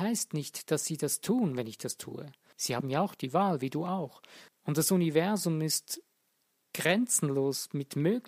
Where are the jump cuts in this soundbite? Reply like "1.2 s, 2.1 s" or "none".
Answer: 2.5 s, 4.5 s